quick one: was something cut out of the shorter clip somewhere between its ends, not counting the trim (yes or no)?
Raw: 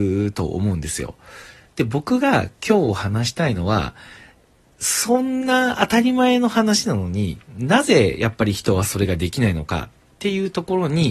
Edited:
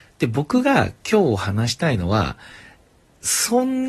no